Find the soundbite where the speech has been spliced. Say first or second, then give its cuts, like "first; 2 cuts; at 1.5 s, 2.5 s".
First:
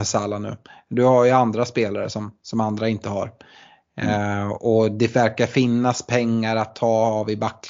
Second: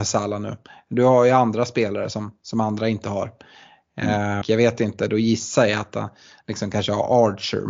second; 1 cut; at 4.4 s